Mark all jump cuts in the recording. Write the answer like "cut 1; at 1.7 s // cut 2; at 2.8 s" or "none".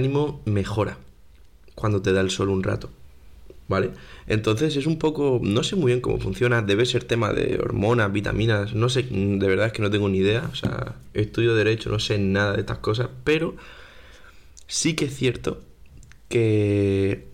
none